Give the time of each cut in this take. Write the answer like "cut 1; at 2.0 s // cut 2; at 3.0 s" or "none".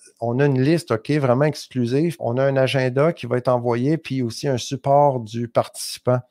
cut 1; at 2.2 s